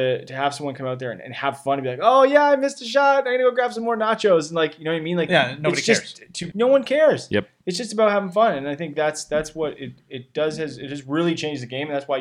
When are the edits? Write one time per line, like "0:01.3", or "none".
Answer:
0:06.5

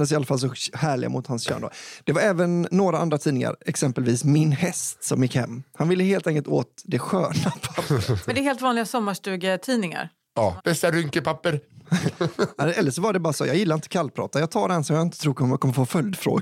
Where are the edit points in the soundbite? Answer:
0:10.6

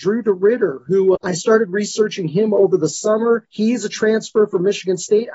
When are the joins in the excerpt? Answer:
0:01.2

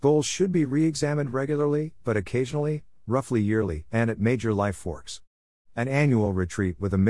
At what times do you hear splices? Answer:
none

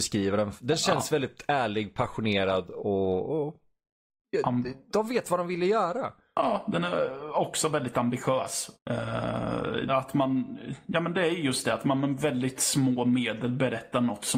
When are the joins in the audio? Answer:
0:08.7
0:09.9

